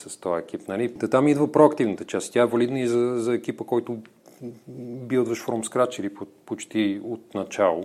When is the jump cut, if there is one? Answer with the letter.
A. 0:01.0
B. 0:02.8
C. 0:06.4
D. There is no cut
A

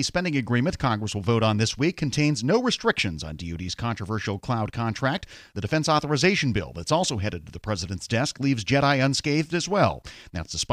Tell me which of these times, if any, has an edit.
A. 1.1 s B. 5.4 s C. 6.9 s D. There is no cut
D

